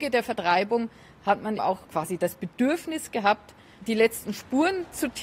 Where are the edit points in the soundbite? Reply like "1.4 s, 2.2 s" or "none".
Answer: 1.6 s